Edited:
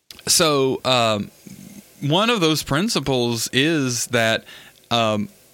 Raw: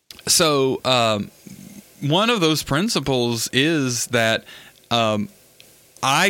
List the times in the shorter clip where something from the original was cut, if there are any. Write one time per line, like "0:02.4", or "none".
none